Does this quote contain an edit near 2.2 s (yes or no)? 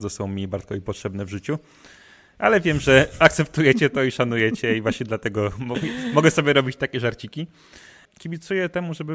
no